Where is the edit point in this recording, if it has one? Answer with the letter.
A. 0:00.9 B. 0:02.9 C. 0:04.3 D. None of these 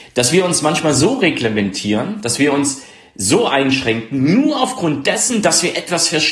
D